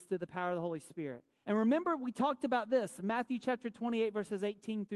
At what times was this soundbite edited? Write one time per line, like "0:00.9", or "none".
0:01.4

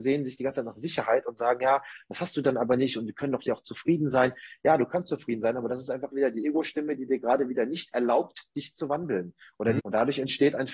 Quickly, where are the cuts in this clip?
0:09.8

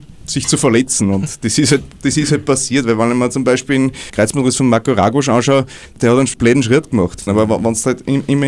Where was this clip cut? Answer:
0:07.3

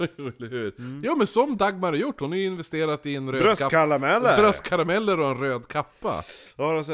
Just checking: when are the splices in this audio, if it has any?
none

